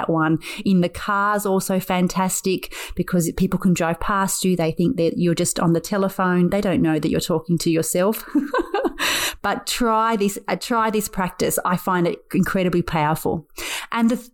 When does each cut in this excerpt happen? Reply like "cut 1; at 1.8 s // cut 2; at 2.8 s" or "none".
none